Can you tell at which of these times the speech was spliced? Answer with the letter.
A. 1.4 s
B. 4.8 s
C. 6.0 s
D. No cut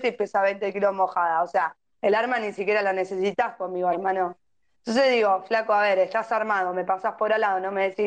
B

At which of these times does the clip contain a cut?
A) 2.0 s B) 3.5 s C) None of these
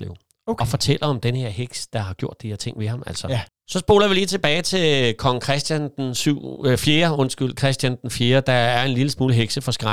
B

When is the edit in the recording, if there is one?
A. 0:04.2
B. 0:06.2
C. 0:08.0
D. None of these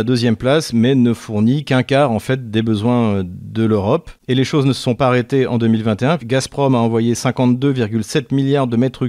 B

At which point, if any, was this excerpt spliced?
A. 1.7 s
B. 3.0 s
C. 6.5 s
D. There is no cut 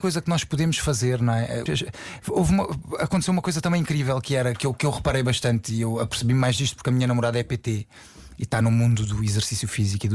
A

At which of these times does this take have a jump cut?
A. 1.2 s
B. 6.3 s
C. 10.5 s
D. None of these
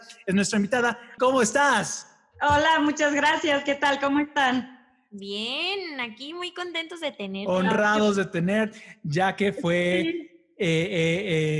A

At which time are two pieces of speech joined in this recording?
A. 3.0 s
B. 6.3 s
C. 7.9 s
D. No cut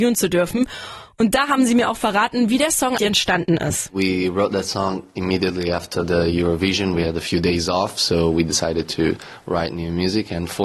A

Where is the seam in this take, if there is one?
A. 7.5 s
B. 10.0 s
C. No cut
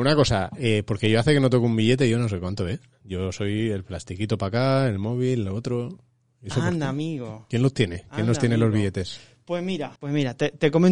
B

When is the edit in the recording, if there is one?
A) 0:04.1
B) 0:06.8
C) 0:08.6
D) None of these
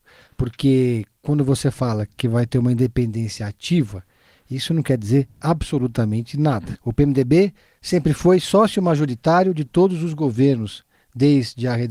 B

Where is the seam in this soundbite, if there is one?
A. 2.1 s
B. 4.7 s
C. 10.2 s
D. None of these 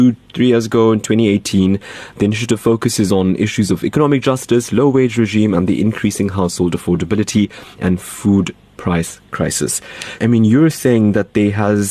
C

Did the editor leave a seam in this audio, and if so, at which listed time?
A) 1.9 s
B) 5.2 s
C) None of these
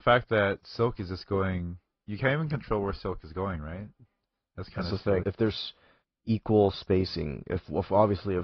B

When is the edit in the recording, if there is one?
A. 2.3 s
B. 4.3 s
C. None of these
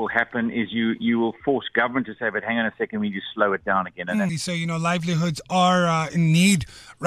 B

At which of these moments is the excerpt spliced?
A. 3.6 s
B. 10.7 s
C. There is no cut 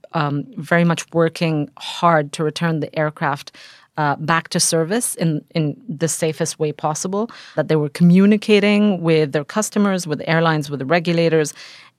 C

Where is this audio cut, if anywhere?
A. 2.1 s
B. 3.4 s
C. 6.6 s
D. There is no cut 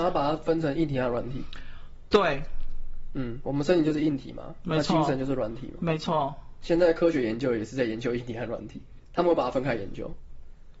C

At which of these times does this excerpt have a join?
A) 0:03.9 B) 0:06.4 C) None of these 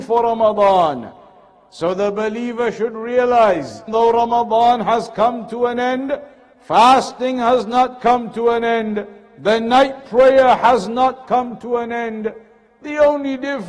A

